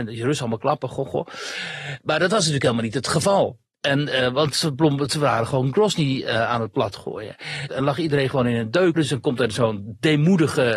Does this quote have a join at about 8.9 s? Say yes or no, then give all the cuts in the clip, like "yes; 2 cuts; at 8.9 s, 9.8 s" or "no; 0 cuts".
yes; 2 cuts; at 7.7 s, 8.9 s